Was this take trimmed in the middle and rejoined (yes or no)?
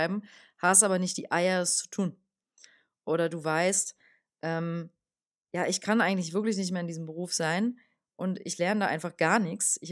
no